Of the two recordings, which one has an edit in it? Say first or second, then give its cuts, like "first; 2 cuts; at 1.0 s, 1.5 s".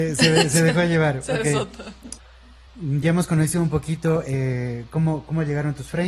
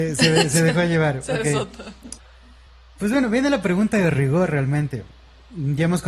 first; 1 cut; at 2.7 s